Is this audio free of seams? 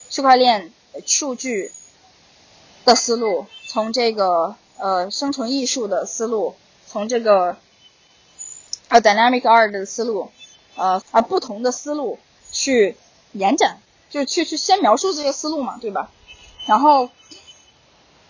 no; 1 cut; at 11.0 s

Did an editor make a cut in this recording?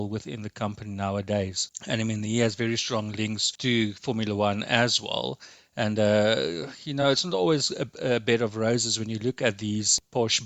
no; 0 cuts

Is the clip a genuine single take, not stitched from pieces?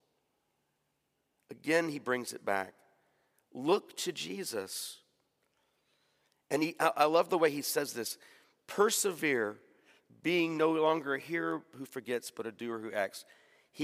yes; 0 cuts

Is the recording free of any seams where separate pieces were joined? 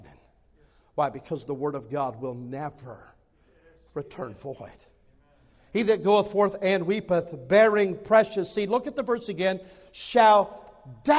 yes; 0 cuts

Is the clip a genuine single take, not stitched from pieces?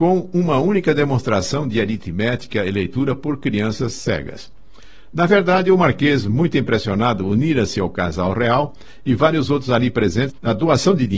yes; 0 cuts

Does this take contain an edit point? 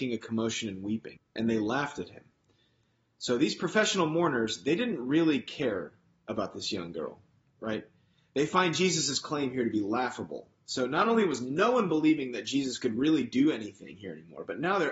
yes; 1 cut; at 1.2 s

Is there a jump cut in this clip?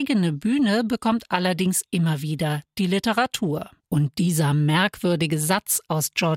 yes; 1 cut; at 3.8 s

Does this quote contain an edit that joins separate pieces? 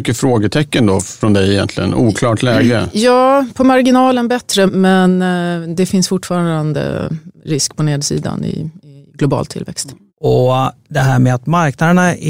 yes; 2 cuts; at 4.7 s, 10.1 s

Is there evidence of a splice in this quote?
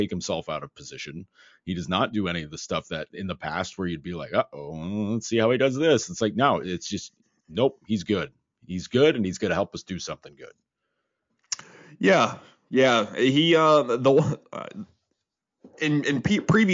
no; 0 cuts

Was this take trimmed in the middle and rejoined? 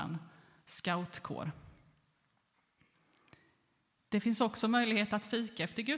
no; 0 cuts

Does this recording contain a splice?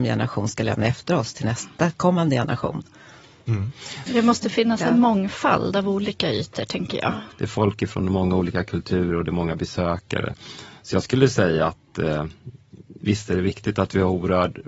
yes; 2 cuts; at 4.1 s, 7.3 s

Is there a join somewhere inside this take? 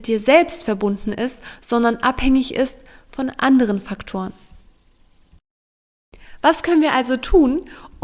no; 0 cuts

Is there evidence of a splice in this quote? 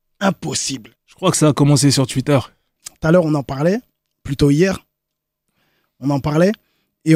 yes; 2 cuts; at 1.0 s, 2.8 s

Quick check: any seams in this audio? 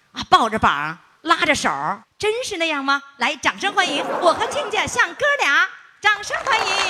yes; 1 cut; at 2.0 s

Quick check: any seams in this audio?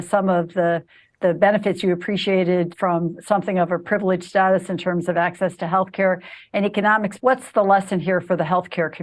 yes; 2 cuts; at 2.7 s, 7.2 s

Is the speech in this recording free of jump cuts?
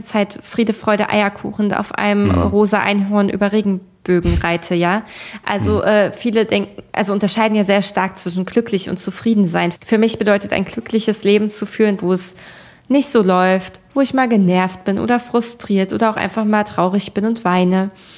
no; 2 cuts; at 9.7 s, 12.0 s

